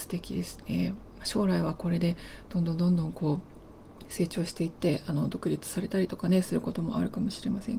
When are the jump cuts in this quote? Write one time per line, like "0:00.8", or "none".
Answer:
0:01.2